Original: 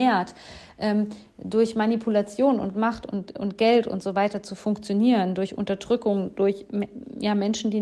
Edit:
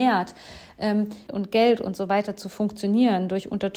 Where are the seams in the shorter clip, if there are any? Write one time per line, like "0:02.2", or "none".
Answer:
0:01.3